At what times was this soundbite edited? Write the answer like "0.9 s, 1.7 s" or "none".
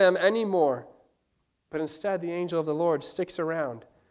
none